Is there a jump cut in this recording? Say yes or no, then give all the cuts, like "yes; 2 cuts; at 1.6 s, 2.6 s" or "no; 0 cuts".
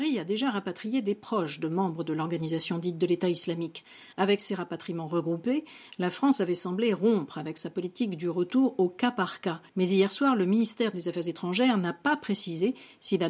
yes; 2 cuts; at 4.1 s, 9.7 s